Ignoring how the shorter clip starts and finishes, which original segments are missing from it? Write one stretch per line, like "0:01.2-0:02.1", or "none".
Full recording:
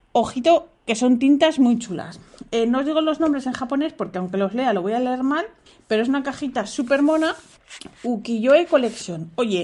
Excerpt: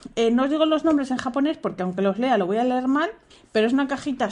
none